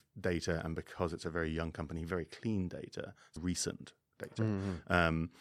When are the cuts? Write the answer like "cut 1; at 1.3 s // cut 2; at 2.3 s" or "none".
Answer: cut 1; at 3.4 s